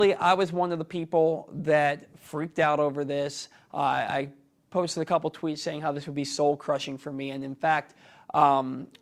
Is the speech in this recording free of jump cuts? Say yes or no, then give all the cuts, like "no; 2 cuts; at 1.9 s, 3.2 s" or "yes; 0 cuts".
yes; 0 cuts